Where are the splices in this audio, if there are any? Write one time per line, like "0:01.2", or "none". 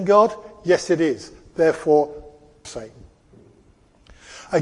0:02.6